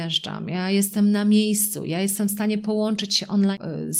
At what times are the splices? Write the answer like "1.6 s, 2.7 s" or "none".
none